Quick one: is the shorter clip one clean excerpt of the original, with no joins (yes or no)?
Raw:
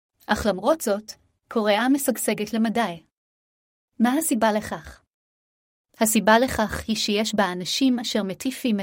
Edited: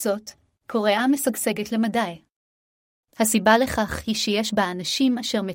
no